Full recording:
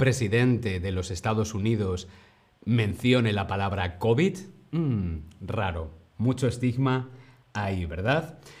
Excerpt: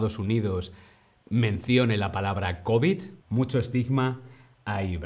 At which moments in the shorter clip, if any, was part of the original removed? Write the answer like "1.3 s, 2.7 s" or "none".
3.2 s